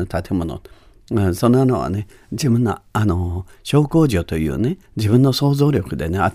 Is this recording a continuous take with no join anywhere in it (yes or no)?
no